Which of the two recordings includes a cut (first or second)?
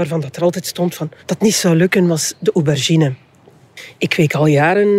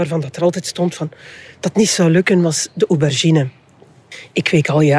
first